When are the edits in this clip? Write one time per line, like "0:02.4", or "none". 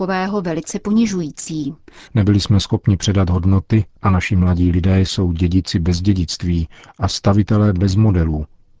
0:02.1